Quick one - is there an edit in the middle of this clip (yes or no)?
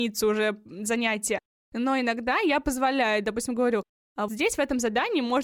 yes